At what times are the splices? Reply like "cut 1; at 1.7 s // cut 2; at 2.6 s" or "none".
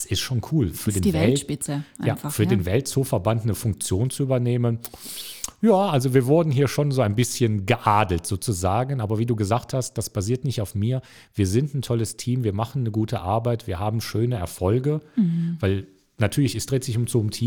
none